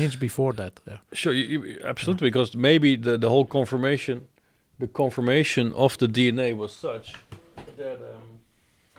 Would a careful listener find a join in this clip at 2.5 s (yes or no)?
no